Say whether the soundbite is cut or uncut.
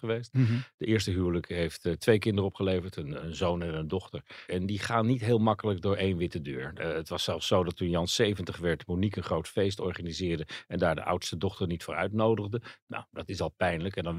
cut